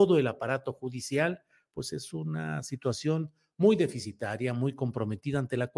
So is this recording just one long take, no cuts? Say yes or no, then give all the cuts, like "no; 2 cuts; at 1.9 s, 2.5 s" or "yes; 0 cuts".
yes; 0 cuts